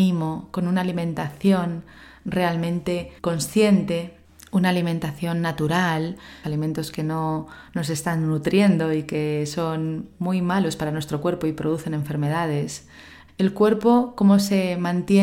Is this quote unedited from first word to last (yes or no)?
no